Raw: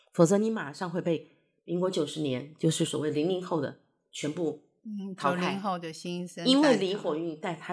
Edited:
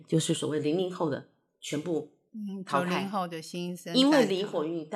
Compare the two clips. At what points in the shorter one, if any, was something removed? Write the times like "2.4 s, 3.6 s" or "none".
none